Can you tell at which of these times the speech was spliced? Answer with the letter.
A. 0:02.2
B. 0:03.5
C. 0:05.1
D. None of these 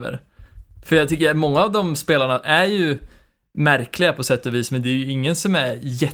D